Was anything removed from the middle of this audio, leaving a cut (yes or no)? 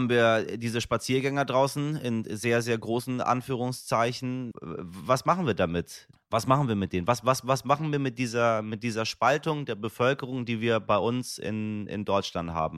yes